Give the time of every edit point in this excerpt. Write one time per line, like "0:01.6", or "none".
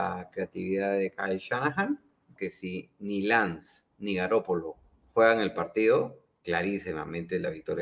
0:02.4